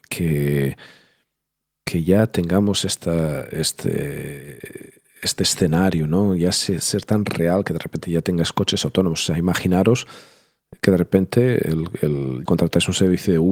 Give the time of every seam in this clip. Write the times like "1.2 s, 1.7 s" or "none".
12.5 s